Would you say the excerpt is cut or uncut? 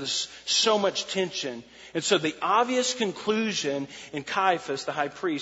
uncut